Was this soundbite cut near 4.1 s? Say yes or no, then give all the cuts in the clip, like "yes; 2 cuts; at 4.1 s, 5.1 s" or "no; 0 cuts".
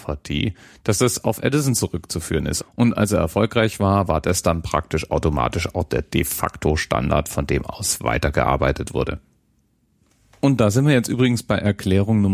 no; 1 cut; at 2.6 s